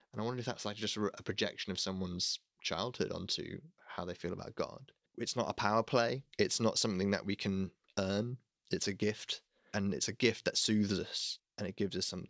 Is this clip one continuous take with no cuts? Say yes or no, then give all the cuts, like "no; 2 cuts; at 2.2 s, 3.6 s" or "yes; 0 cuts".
no; 3 cuts; at 5.1 s, 6.3 s, 11.4 s